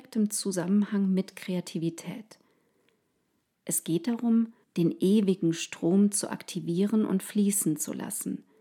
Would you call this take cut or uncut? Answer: cut